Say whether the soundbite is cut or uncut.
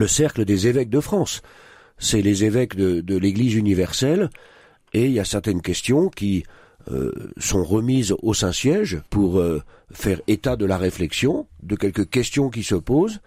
cut